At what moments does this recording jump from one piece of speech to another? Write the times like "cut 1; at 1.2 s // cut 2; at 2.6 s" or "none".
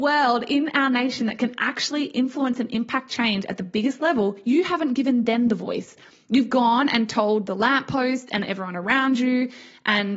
none